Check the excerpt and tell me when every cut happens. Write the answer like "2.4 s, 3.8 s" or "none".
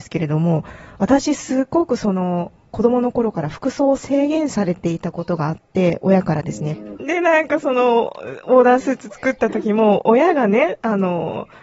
7.0 s